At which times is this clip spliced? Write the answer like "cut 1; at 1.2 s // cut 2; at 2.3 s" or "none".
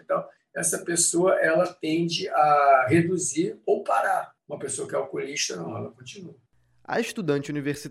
none